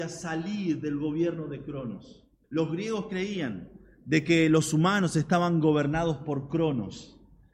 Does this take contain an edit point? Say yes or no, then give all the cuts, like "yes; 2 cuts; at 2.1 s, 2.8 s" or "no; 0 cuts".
yes; 1 cut; at 2.4 s